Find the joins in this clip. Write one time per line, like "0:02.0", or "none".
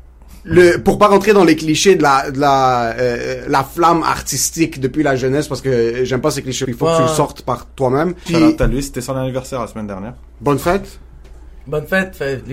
0:06.6
0:08.3